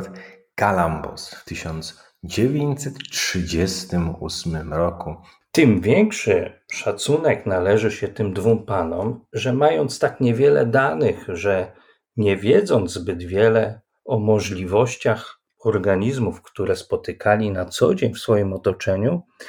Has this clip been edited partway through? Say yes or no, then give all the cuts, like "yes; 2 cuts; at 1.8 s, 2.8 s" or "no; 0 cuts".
no; 0 cuts